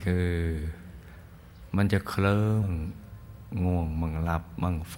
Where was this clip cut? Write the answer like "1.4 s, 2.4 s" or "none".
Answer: 2.6 s